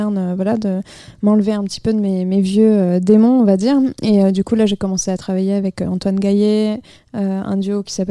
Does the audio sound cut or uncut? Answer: uncut